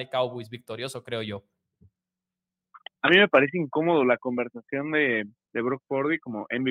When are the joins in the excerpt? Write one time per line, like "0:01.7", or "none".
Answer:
none